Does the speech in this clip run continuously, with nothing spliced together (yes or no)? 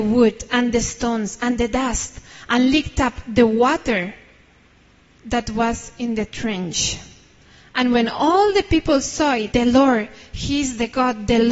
no